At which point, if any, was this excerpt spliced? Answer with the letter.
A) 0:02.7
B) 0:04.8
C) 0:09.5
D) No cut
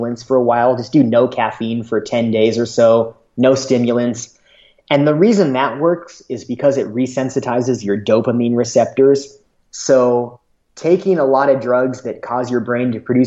C